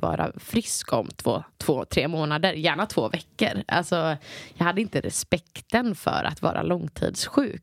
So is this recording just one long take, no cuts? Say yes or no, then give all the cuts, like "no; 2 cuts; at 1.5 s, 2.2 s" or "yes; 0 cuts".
no; 1 cut; at 1.5 s